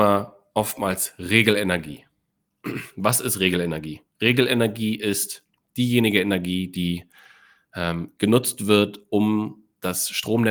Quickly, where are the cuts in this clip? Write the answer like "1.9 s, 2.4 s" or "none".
none